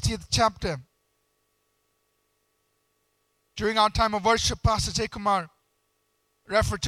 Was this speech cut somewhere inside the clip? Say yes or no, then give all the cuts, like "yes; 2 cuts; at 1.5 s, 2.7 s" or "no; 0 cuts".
no; 0 cuts